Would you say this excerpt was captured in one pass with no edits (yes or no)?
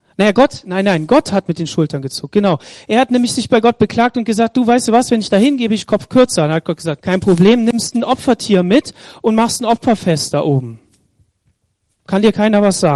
no